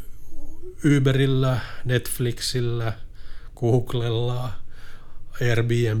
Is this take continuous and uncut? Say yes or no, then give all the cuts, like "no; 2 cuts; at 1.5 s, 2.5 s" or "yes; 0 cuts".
yes; 0 cuts